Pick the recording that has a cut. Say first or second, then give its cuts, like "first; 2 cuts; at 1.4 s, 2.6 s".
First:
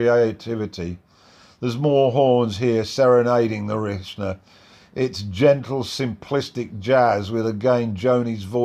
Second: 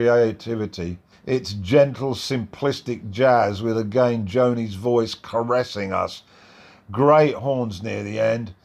second; 1 cut; at 1.1 s